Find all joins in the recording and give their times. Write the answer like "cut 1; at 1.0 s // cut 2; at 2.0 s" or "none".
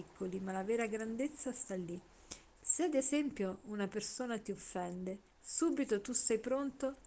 cut 1; at 2.6 s // cut 2; at 5.3 s